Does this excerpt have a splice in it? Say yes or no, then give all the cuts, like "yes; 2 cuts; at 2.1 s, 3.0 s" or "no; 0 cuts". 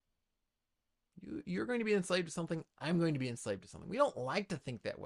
no; 0 cuts